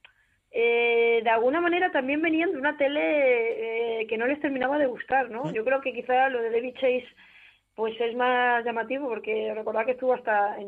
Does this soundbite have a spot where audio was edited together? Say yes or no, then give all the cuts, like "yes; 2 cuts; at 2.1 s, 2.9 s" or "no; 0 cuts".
no; 0 cuts